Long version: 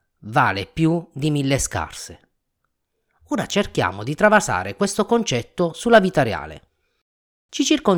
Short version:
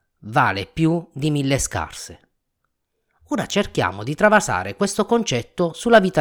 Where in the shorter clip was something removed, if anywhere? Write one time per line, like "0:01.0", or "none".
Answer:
none